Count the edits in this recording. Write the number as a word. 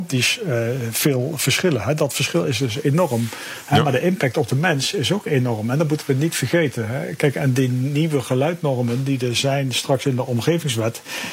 zero